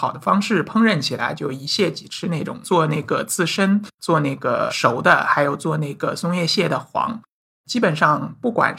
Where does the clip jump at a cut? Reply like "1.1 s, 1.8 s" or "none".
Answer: none